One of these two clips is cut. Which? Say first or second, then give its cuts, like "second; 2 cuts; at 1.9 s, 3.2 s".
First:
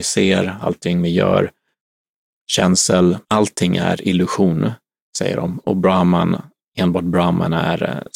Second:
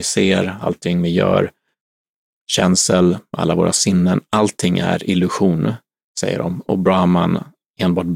first; 1 cut; at 3.2 s